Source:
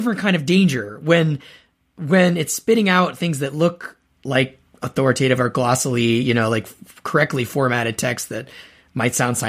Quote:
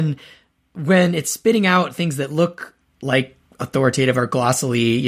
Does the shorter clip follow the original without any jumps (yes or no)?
yes